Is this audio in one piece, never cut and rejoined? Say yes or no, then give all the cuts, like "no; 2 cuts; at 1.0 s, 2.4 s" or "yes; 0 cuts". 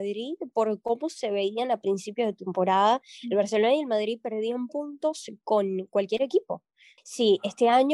no; 1 cut; at 7.0 s